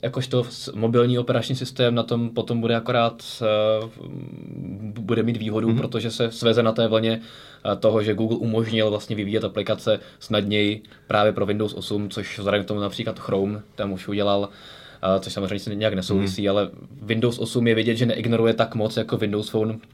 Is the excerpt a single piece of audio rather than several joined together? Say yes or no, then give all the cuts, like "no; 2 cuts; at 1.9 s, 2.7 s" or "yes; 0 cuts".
yes; 0 cuts